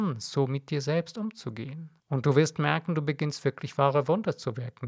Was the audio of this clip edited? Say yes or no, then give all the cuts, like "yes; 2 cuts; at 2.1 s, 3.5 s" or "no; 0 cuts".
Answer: yes; 1 cut; at 2.0 s